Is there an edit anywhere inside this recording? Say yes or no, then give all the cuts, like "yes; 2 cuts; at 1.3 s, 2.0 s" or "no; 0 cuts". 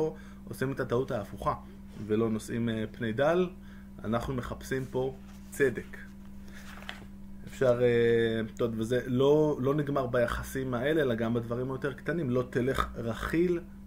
no; 0 cuts